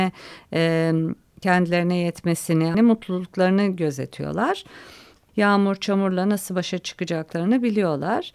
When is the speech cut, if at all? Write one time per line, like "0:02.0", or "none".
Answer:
0:02.7
0:05.3